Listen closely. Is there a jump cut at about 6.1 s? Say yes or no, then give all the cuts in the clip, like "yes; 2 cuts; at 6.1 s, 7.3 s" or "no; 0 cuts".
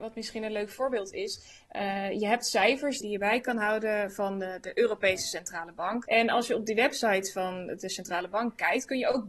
yes; 2 cuts; at 3.0 s, 6.1 s